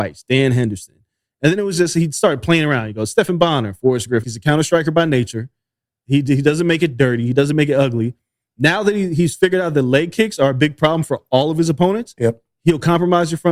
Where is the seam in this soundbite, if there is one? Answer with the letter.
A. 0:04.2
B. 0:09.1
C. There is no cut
A